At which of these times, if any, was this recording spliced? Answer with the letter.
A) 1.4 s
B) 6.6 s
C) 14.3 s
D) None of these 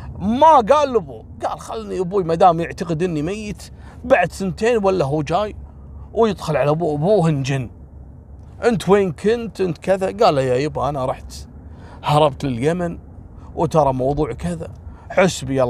C